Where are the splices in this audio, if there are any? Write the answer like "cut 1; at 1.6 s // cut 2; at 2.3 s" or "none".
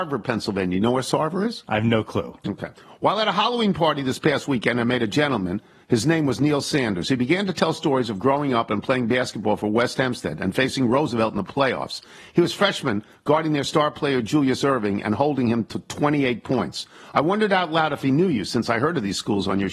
none